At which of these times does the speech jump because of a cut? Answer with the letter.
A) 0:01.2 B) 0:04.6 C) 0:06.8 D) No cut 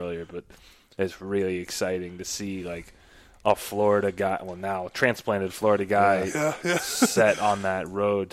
D